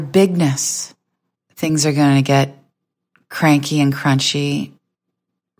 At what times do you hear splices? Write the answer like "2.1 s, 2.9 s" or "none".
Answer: 1.3 s